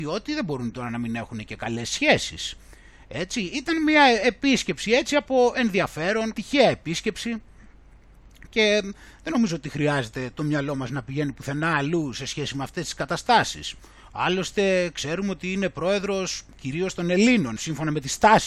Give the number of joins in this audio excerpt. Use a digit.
2